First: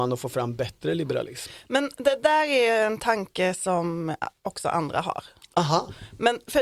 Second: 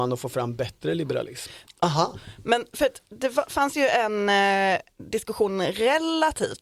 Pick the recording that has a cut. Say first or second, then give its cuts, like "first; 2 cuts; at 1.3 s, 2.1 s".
second; 1 cut; at 1.7 s